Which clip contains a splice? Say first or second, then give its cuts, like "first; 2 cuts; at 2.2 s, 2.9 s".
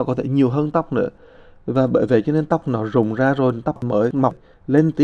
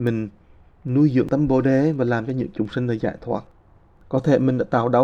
second; 1 cut; at 4.0 s